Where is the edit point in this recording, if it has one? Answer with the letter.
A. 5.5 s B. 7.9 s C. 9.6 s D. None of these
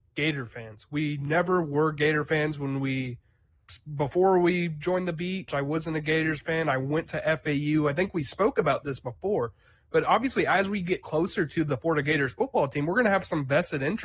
A